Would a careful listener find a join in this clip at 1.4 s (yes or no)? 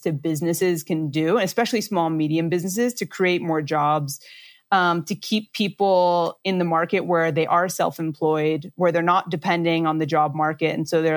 no